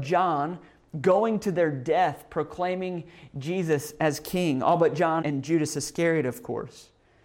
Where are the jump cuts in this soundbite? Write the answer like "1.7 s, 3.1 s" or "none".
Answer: 5.2 s